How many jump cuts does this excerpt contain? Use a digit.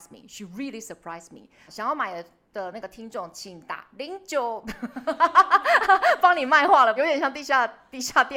2